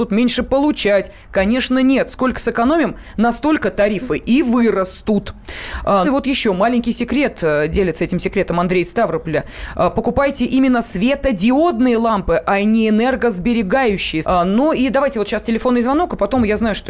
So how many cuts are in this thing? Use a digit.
2